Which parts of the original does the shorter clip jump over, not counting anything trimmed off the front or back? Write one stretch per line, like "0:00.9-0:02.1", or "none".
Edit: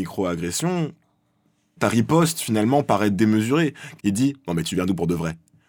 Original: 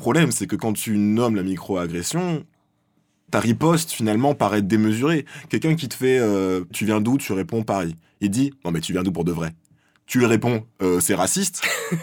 0:05.5-0:08.1